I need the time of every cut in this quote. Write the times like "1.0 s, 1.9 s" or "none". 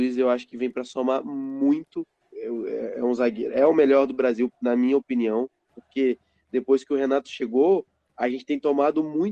2.2 s, 5.7 s